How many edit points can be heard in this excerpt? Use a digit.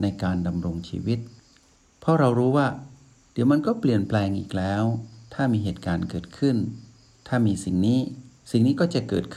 0